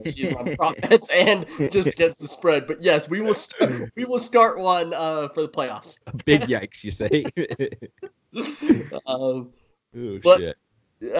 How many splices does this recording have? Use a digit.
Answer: 1